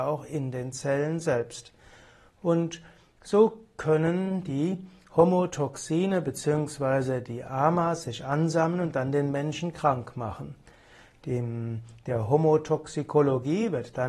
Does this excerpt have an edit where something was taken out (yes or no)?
no